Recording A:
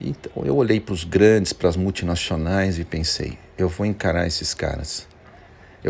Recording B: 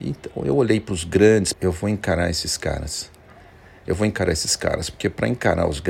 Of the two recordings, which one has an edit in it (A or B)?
B